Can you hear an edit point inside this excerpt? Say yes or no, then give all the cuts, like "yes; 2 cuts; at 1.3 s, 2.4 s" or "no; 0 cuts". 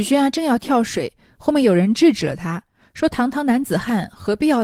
no; 0 cuts